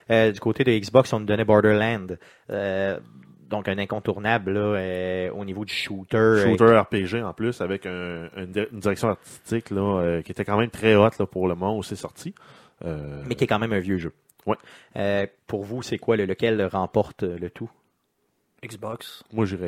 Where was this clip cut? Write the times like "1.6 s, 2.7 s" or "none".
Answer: none